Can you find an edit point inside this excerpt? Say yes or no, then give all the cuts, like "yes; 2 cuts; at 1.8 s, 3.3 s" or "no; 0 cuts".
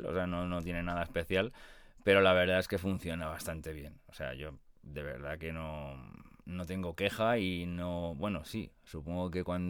no; 0 cuts